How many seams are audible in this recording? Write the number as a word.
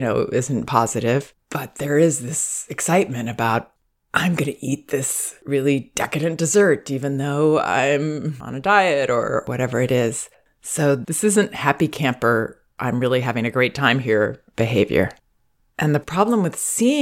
zero